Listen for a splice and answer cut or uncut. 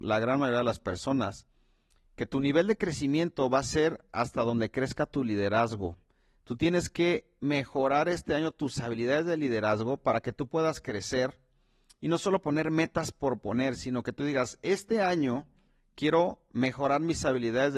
uncut